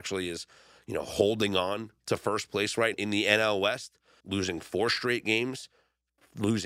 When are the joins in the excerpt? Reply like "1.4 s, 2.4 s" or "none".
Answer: 2.9 s, 4.2 s